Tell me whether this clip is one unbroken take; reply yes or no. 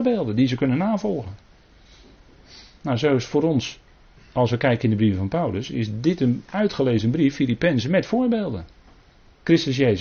yes